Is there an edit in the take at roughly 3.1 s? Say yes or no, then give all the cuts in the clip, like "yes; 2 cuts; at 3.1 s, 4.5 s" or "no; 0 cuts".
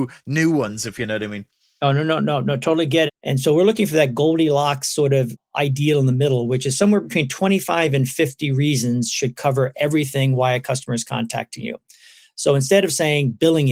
yes; 1 cut; at 3.1 s